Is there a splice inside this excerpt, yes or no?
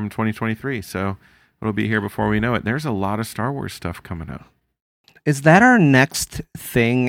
no